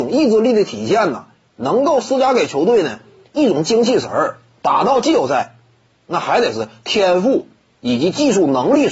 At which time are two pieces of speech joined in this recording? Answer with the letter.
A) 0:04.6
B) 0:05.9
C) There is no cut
A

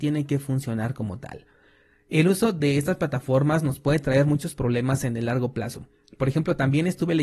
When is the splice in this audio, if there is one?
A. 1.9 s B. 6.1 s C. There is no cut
C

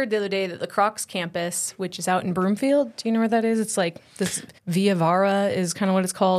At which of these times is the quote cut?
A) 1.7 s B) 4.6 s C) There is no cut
B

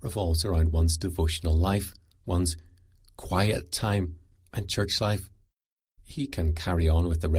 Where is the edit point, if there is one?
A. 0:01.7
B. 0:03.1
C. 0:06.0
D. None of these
C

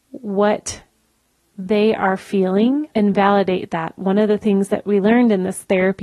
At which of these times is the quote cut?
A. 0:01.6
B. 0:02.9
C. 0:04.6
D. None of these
B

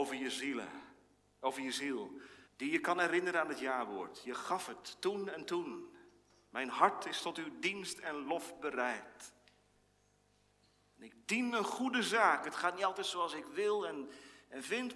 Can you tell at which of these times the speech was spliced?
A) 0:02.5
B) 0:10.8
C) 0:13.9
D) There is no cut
A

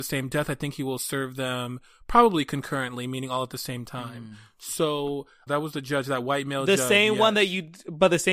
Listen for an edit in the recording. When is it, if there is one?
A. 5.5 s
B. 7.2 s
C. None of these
A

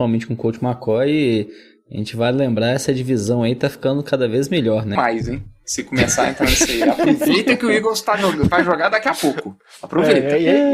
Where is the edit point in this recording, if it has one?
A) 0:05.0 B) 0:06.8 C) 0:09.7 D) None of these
A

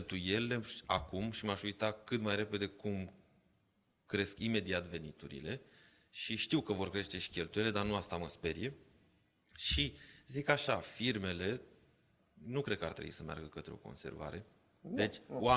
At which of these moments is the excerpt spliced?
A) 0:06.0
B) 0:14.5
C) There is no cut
C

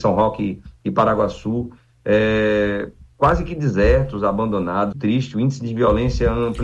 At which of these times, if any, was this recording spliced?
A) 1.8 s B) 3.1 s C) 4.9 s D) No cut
C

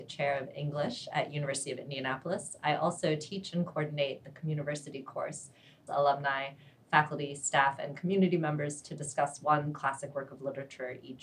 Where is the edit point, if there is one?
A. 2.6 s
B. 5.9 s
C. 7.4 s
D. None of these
B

